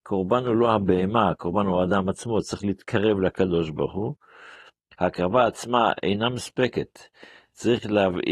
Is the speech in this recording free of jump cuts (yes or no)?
yes